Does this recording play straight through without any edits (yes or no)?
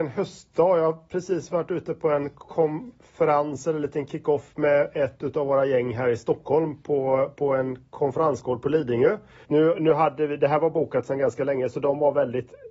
no